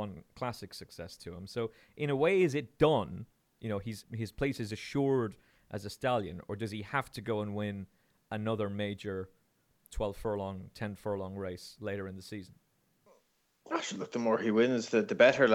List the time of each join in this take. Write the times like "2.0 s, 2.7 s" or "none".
4.0 s